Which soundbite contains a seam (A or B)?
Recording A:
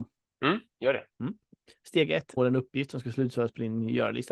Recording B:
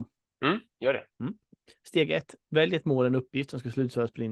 A